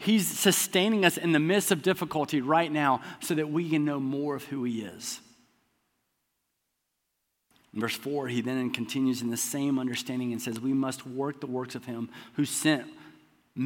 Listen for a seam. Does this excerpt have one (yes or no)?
no